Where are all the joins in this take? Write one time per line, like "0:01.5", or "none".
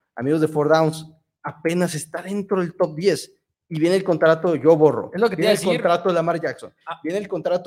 none

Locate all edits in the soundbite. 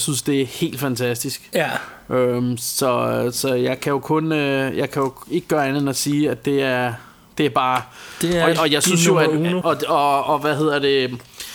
0:09.6

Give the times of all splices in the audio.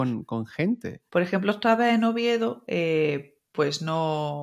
0:01.1

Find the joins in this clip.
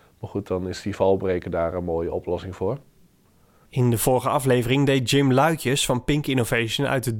0:03.7

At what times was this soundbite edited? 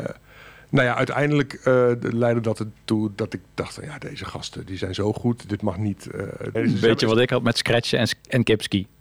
0:06.5

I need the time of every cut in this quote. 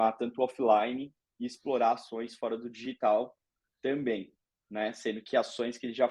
none

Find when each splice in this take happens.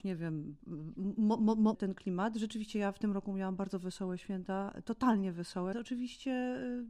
0:01.7
0:05.7

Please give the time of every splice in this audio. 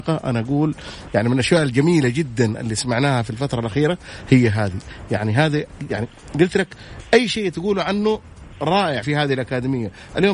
0:09.0

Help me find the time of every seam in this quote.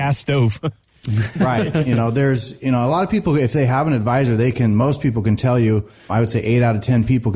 0:06.1

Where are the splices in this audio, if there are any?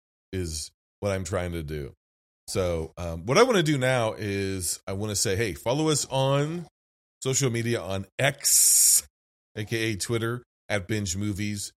none

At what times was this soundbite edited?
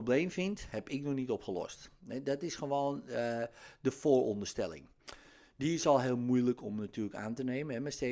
none

